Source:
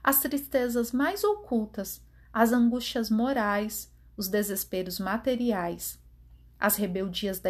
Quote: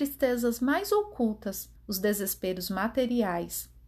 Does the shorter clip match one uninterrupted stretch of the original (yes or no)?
no